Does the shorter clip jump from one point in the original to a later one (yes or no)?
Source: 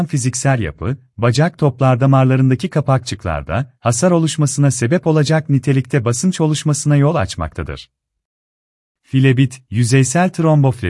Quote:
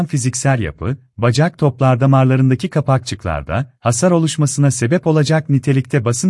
no